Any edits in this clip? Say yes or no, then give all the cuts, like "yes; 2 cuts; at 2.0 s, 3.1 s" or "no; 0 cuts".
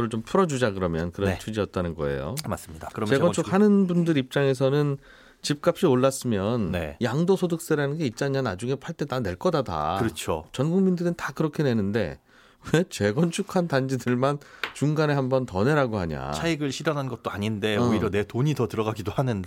no; 0 cuts